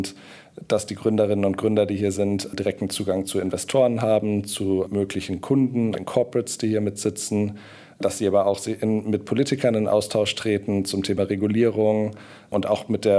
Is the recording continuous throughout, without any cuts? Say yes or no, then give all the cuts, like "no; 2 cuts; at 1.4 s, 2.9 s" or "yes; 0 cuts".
no; 1 cut; at 5.9 s